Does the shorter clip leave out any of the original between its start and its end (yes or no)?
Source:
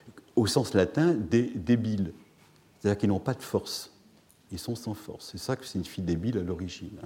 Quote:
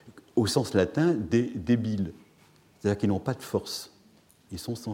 no